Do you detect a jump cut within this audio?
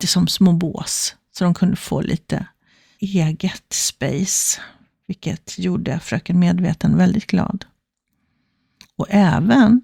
yes; 1 cut; at 2.9 s

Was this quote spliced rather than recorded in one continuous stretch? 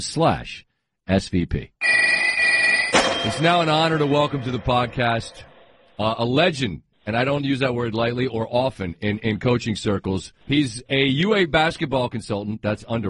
yes; 1 cut; at 10.4 s

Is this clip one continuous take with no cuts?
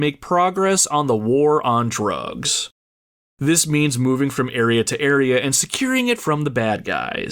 yes; 0 cuts

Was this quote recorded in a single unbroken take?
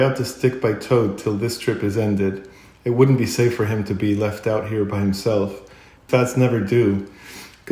no; 1 cut; at 6.0 s

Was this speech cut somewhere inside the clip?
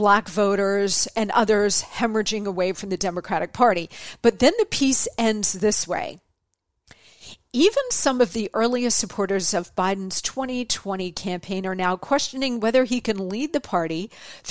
no; 0 cuts

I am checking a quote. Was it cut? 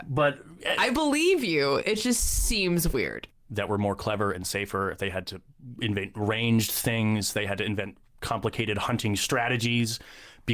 yes; 1 cut; at 3.3 s

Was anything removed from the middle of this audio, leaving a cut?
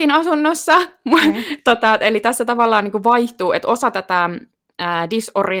no; 0 cuts

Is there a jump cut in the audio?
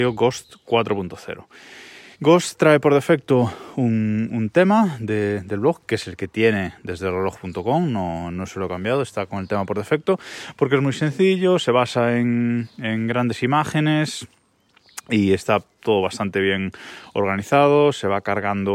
yes; 1 cut; at 2.1 s

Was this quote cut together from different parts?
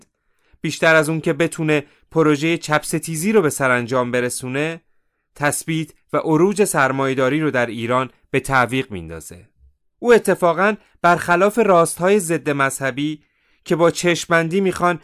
yes; 1 cut; at 9.8 s

